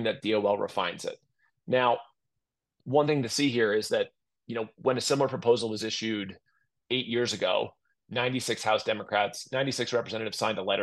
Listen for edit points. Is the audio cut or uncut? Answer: uncut